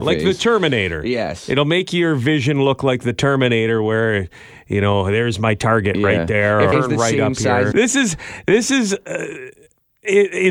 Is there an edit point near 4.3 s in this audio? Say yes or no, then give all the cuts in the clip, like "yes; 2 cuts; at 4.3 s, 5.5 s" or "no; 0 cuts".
no; 2 cuts; at 6.7 s, 7.7 s